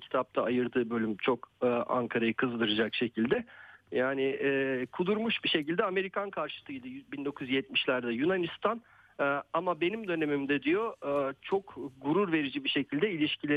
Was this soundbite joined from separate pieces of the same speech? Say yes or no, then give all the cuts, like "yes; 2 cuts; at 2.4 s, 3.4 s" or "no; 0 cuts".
no; 0 cuts